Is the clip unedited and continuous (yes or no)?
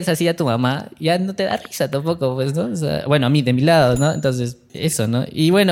no